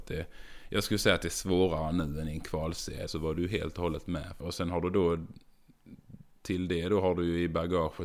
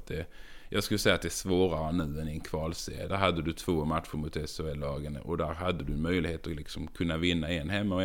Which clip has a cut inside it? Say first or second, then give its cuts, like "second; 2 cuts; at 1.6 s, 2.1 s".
first; 2 cuts; at 3.1 s, 4.4 s